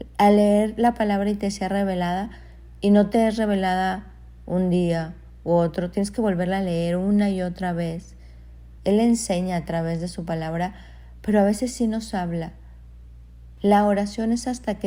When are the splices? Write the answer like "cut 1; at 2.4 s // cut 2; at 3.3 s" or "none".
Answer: cut 1; at 8.8 s // cut 2; at 13.6 s